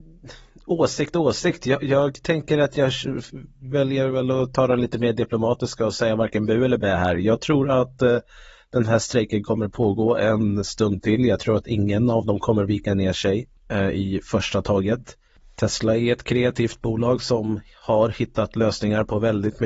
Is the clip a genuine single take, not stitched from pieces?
no; 1 cut; at 13.6 s

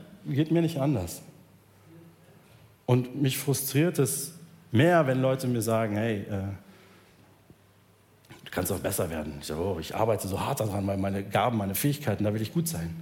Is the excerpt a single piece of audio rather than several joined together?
yes; 0 cuts

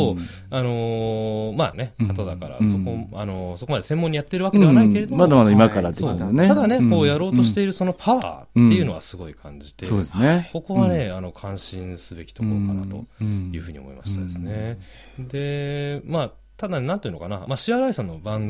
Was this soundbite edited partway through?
yes; 2 cuts; at 1.7 s, 17.5 s

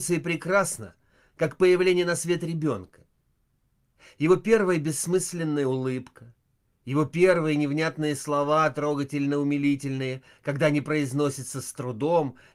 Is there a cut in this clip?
no; 0 cuts

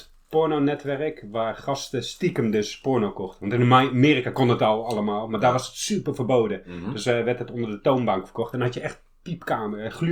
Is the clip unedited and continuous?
yes; 0 cuts

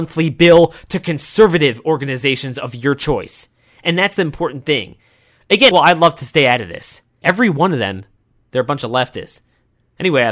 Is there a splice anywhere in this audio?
yes; 2 cuts; at 5.7 s, 7.2 s

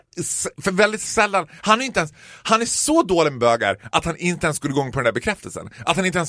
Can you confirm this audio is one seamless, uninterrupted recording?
yes; 0 cuts

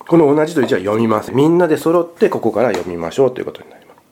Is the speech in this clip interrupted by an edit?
yes; 1 cut; at 1.3 s

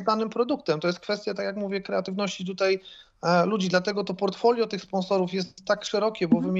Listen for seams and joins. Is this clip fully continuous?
yes; 0 cuts

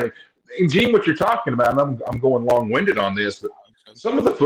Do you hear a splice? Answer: no; 0 cuts

